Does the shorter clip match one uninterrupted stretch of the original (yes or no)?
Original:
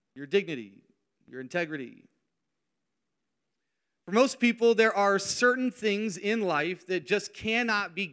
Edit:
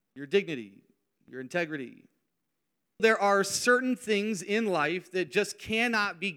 no